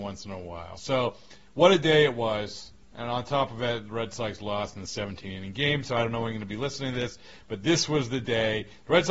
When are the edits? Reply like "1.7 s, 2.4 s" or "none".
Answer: none

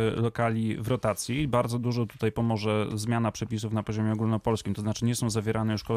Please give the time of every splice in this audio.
none

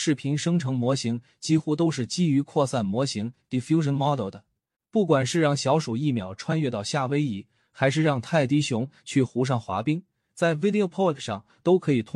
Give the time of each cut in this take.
4.7 s

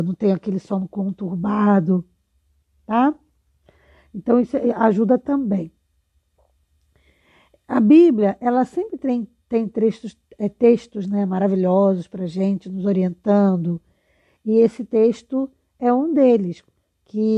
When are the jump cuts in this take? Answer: none

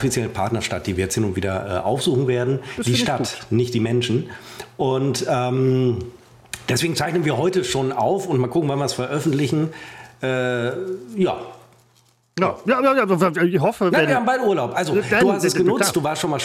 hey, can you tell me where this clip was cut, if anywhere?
none

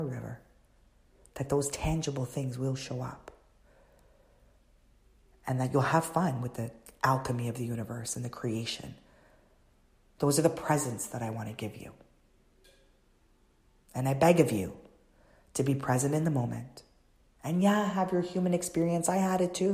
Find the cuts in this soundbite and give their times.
10.2 s

